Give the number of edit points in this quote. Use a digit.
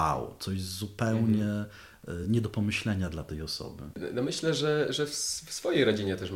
0